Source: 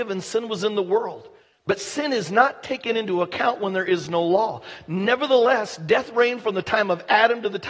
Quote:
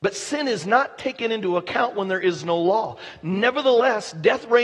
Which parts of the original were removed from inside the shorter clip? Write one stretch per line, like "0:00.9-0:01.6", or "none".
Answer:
none